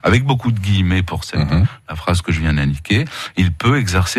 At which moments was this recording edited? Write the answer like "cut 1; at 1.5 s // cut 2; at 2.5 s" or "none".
none